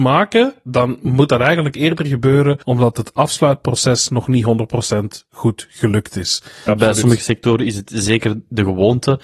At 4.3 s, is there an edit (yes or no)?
no